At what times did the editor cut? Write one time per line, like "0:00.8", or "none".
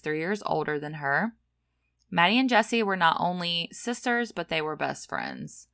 none